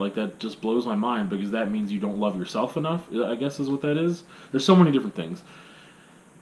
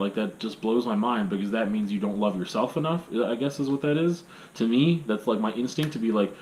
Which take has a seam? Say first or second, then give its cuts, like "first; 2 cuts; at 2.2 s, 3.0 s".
first; 1 cut; at 4.5 s